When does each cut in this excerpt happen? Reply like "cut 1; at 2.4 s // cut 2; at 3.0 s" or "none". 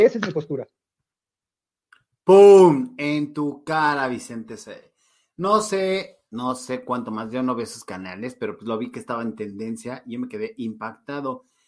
none